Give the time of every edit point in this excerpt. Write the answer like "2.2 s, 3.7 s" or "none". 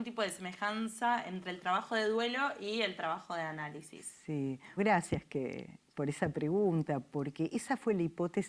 4.8 s